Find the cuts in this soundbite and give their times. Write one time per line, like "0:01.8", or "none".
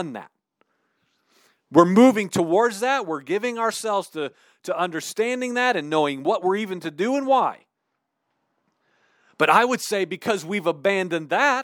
none